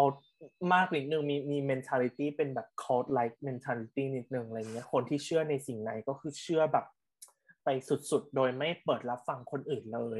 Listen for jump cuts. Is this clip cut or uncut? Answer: uncut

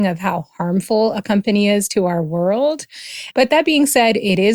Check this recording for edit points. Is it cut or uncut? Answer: cut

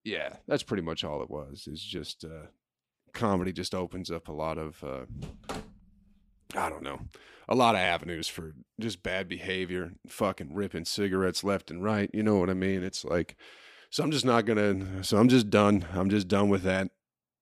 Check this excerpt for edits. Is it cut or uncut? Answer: uncut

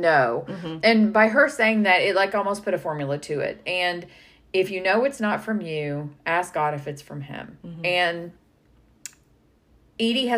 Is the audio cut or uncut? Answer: uncut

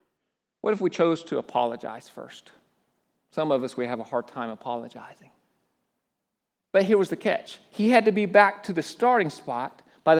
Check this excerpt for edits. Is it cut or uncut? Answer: cut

